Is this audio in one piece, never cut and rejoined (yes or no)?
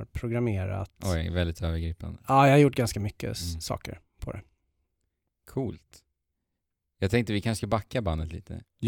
yes